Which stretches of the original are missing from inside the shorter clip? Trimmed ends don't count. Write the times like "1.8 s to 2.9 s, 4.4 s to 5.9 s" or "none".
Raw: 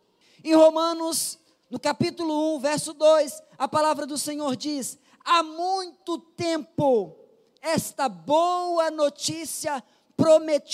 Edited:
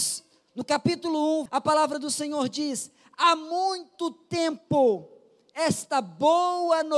2.6 s to 3.5 s